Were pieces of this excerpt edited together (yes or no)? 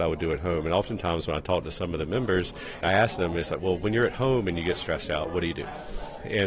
yes